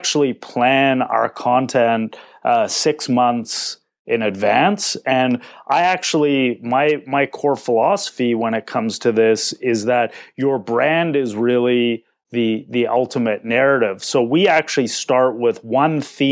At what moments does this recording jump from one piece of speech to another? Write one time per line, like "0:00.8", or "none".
none

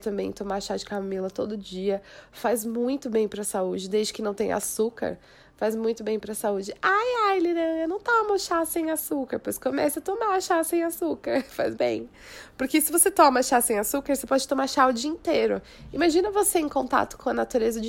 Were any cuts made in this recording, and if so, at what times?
0:11.7

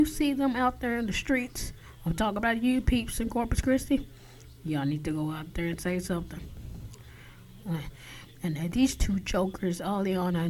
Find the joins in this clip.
0:07.6
0:08.7

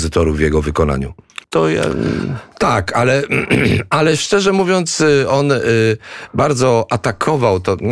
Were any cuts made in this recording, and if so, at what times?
0:01.4

